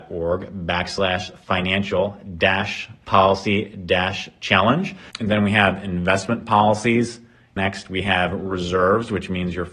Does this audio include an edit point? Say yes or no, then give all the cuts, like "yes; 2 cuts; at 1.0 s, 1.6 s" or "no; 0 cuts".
yes; 2 cuts; at 5.1 s, 7.6 s